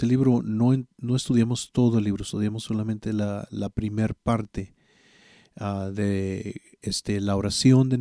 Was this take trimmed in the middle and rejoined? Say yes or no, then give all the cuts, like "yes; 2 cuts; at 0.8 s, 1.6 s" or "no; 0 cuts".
no; 0 cuts